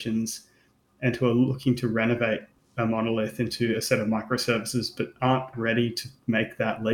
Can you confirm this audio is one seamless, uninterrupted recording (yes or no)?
no